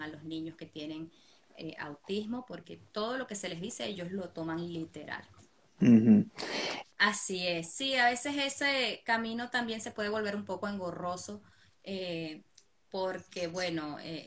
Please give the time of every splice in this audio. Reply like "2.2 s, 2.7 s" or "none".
6.8 s